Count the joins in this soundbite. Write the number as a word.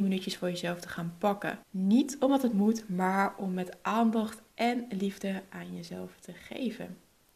one